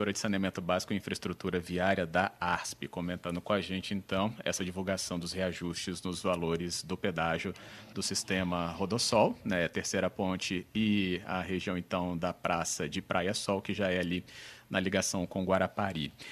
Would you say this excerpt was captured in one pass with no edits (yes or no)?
yes